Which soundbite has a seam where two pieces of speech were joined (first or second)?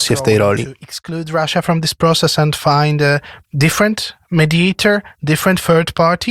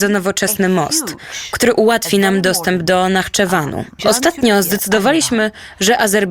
second